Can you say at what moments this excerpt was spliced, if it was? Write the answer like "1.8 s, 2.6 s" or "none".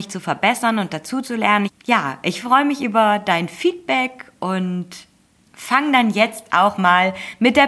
1.7 s